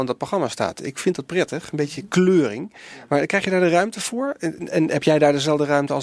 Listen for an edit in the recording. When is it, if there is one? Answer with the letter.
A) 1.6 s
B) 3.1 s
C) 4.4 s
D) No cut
D